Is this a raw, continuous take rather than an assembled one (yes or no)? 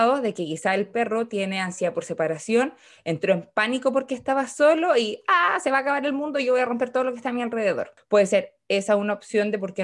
yes